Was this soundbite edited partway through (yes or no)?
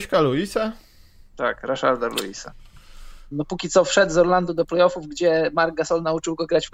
yes